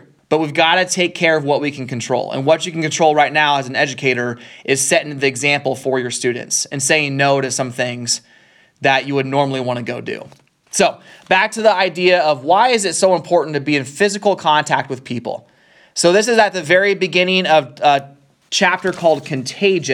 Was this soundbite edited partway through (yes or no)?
no